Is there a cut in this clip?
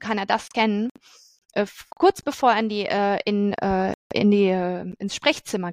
yes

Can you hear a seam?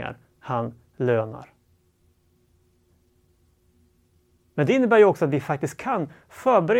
no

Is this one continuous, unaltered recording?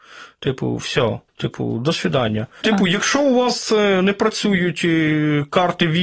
no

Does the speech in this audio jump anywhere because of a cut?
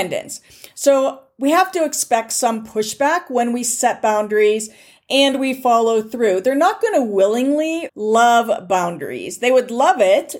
yes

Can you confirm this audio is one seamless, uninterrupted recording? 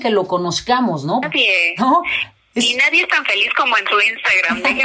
no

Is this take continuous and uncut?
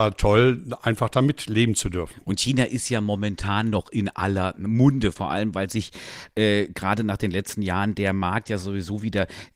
yes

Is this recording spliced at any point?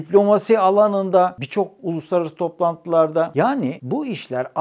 no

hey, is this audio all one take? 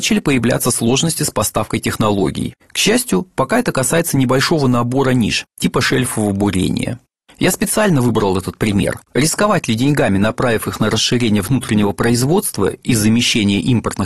no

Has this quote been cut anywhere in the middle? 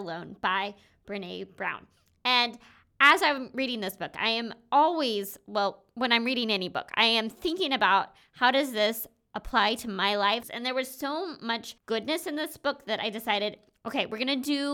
yes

